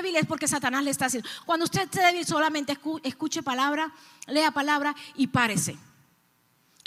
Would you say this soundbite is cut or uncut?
uncut